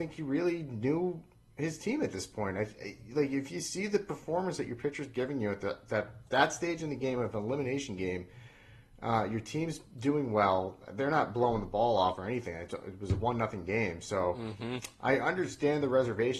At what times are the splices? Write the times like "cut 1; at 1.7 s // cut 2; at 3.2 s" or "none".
none